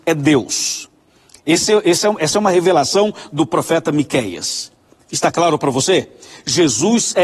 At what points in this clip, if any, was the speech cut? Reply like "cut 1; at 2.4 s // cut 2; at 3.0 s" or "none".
none